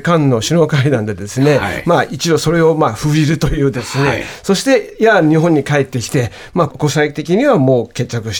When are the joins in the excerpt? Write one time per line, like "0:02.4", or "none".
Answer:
0:03.7
0:06.7